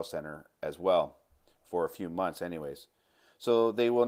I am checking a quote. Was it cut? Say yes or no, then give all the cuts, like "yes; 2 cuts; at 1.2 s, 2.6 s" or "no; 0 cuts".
no; 0 cuts